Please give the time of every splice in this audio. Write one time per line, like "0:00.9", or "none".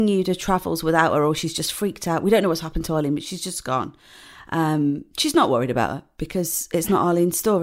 none